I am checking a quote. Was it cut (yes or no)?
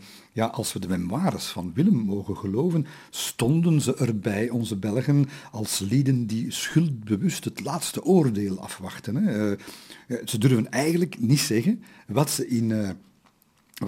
no